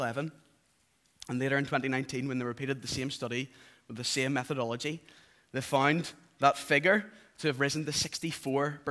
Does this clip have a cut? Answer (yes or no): no